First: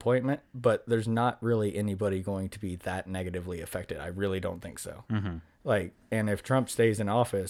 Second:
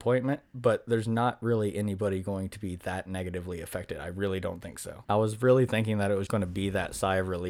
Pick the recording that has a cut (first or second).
second